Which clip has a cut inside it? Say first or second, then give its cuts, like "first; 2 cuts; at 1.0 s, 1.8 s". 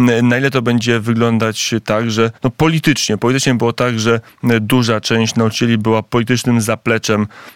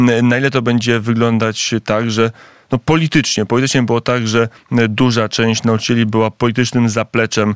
first; 1 cut; at 2.4 s